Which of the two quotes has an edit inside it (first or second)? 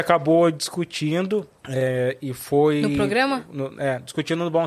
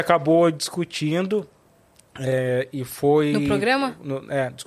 first